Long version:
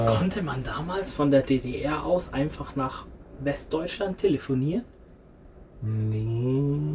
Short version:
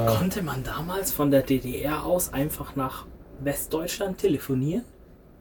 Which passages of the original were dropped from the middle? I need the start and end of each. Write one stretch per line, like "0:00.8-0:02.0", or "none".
none